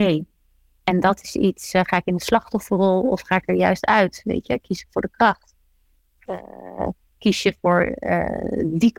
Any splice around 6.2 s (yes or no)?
yes